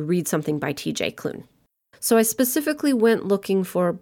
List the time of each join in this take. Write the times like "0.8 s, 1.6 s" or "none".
1.9 s